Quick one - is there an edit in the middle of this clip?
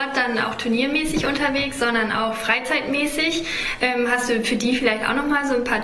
no; 0 cuts

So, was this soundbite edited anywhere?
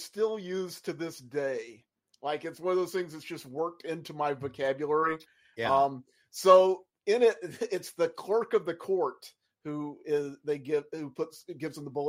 no; 0 cuts

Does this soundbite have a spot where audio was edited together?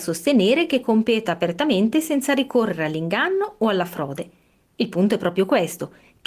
no; 0 cuts

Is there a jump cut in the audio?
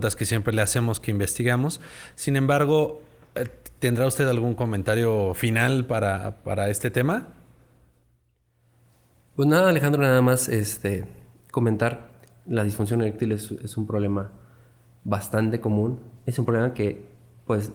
no; 0 cuts

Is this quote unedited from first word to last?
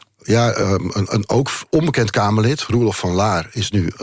yes; 0 cuts

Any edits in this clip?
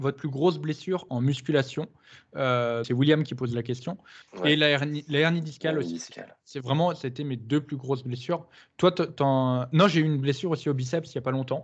yes; 3 cuts; at 1.1 s, 2.8 s, 4.2 s

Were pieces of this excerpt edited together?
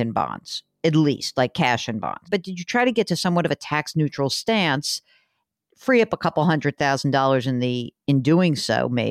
yes; 1 cut; at 2.2 s

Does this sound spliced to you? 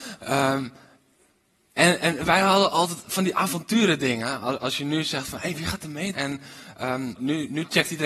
yes; 2 cuts; at 6.1 s, 7.1 s

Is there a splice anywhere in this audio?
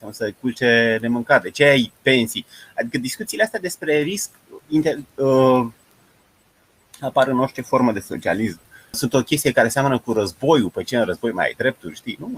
yes; 2 cuts; at 4.6 s, 8.9 s

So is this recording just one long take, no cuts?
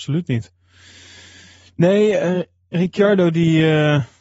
yes; 0 cuts

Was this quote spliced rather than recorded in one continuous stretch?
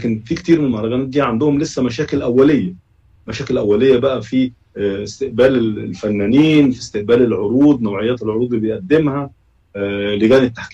no; 0 cuts

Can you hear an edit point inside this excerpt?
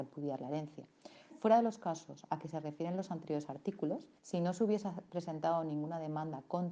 yes; 2 cuts; at 1.3 s, 4.2 s

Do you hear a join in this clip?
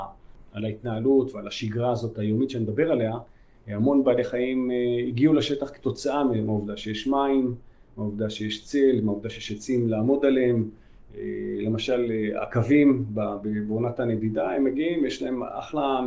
no; 0 cuts

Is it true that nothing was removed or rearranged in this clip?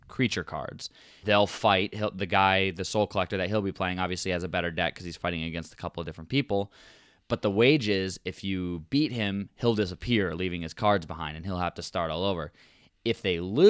no; 1 cut; at 1.2 s

